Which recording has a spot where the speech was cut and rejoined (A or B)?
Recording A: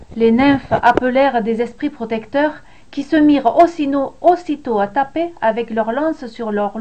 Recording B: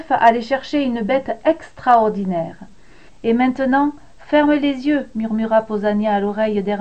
B